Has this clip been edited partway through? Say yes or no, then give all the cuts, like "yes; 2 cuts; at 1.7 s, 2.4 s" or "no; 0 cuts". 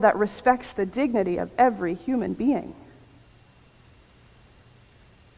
no; 0 cuts